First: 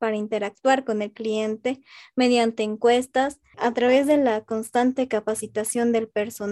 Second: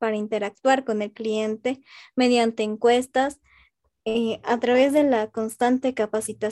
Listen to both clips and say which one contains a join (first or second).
first